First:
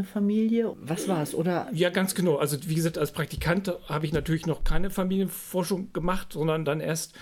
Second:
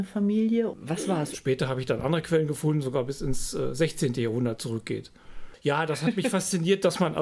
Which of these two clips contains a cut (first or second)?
second